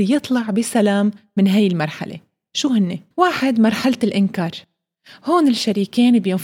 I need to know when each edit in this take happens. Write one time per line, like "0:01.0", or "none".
0:03.1